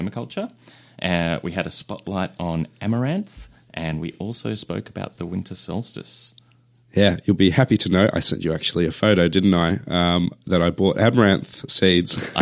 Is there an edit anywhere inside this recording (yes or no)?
no